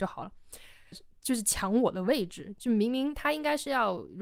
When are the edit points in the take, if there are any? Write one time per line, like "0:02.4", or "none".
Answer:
0:00.9